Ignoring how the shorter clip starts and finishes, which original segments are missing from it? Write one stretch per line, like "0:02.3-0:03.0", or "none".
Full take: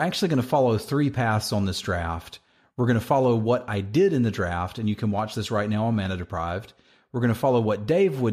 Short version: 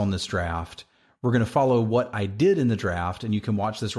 none